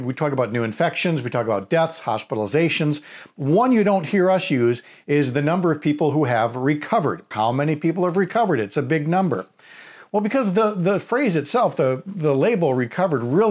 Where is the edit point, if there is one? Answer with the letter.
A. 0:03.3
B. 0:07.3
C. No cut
B